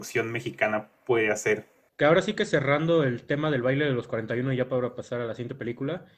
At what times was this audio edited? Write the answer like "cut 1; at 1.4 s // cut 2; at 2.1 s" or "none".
none